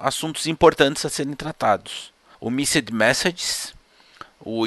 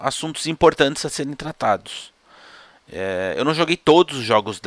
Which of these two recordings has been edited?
first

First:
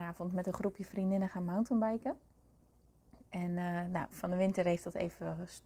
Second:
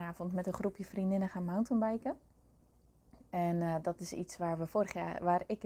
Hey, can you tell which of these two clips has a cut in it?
first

